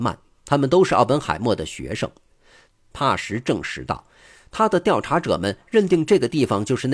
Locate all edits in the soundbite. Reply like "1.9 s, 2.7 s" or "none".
2.7 s

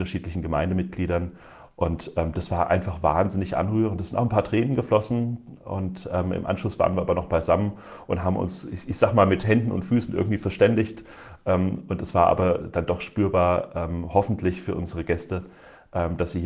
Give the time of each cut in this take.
none

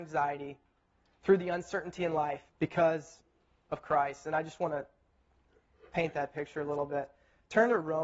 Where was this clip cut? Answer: 2.5 s

